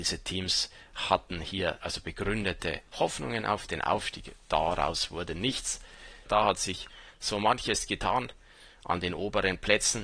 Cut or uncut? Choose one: cut